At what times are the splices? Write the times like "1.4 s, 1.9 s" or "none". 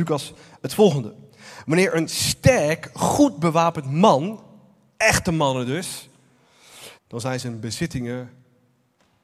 7.0 s

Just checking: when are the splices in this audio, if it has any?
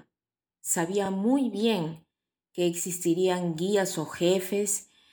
none

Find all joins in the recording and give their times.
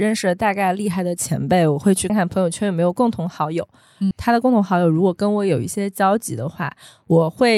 2.1 s, 4.1 s

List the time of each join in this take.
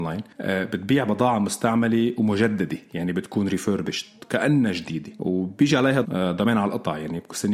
6.0 s

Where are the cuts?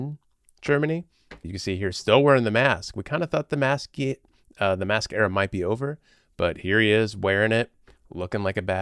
1.4 s

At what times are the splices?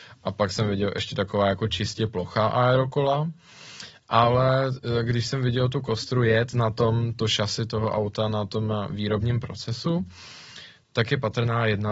none

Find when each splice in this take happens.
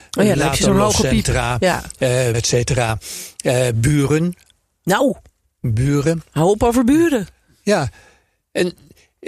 2.3 s

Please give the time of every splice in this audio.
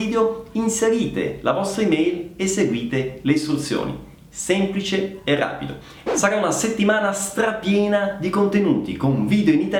6.1 s

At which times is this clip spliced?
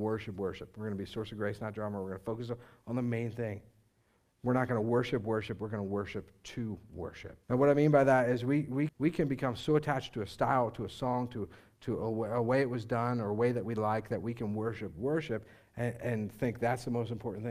7.4 s, 8.9 s

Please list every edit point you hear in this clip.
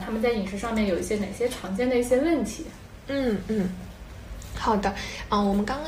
none

